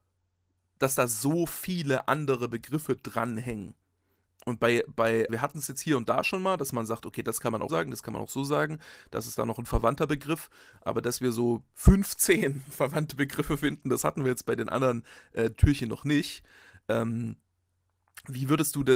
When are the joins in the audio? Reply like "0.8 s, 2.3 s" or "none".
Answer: 5.3 s, 7.7 s